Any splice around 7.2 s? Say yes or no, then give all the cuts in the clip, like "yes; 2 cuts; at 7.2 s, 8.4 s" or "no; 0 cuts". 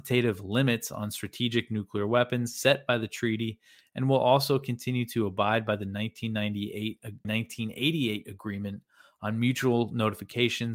yes; 1 cut; at 7.2 s